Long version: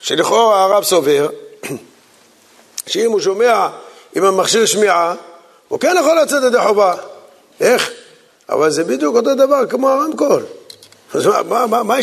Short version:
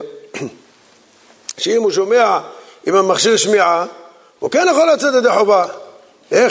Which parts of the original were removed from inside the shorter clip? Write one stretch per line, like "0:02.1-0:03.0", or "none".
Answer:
none